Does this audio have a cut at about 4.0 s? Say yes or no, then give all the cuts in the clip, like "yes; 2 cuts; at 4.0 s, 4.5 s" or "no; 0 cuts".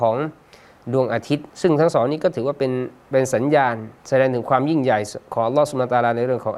yes; 2 cuts; at 1.5 s, 4.0 s